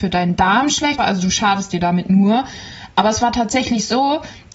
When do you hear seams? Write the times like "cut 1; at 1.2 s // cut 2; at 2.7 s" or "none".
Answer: cut 1; at 1.0 s